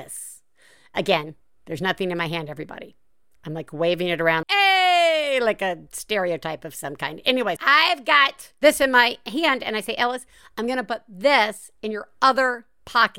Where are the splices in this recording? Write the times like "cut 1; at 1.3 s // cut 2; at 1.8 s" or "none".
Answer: cut 1; at 4.4 s // cut 2; at 7.6 s

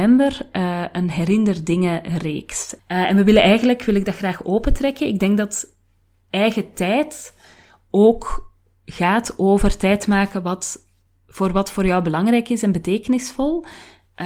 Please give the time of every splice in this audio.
cut 1; at 2.8 s

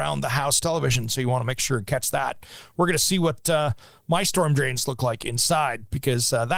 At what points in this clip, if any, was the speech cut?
none

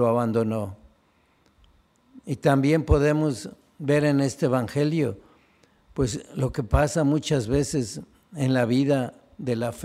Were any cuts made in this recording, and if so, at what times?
none

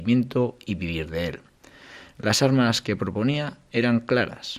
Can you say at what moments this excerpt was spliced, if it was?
none

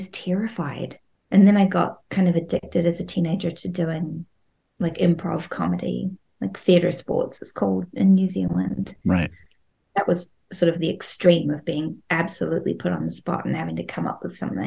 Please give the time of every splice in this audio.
cut 1; at 1.1 s

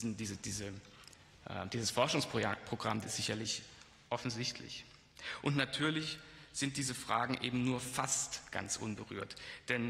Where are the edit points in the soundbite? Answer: cut 1; at 3.0 s

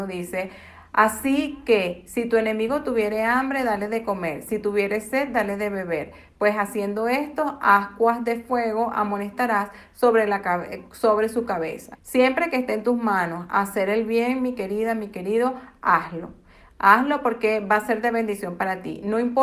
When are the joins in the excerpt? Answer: cut 1; at 11.9 s

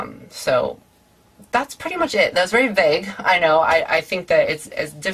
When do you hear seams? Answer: none

